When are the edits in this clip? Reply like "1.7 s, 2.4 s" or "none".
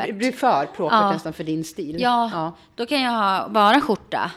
none